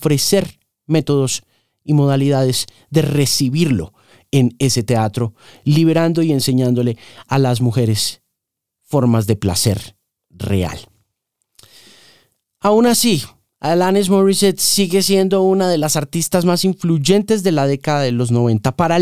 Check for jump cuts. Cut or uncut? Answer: uncut